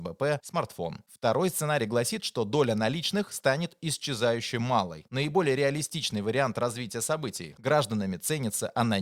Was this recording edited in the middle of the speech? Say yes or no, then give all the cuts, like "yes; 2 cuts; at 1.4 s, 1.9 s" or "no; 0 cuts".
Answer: yes; 1 cut; at 7.6 s